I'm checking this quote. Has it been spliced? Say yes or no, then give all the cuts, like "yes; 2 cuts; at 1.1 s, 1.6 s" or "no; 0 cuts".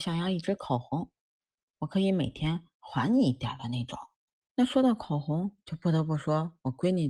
no; 0 cuts